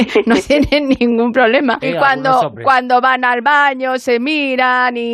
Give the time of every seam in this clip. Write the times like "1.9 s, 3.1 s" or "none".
1.8 s